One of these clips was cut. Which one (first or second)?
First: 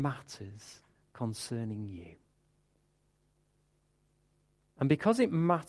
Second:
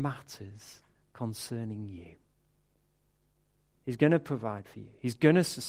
second